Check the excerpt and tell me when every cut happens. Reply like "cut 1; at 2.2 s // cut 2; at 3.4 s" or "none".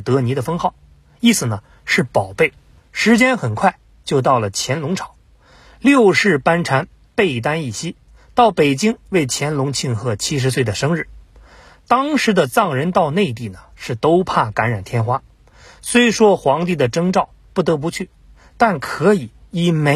cut 1; at 2.8 s